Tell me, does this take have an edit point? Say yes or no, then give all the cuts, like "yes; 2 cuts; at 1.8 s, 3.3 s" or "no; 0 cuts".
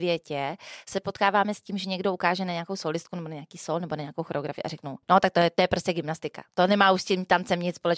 yes; 1 cut; at 5.0 s